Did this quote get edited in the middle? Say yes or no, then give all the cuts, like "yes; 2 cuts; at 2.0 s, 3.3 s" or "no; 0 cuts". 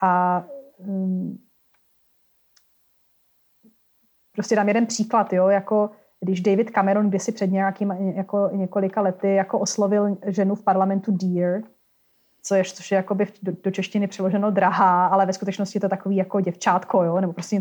no; 0 cuts